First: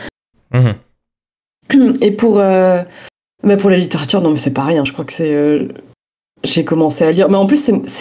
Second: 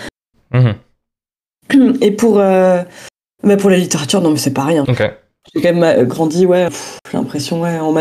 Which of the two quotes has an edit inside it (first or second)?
second